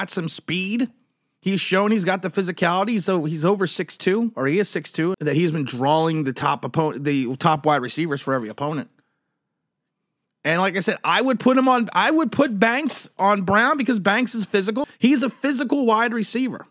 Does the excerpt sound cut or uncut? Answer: cut